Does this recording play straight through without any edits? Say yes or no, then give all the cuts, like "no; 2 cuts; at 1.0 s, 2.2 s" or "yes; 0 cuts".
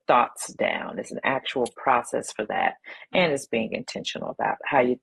yes; 0 cuts